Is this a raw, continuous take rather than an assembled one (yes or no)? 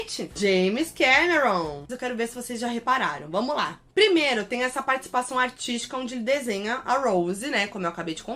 no